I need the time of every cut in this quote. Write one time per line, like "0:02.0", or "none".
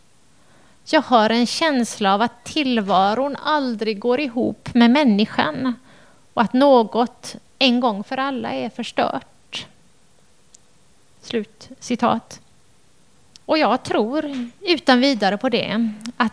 0:13.4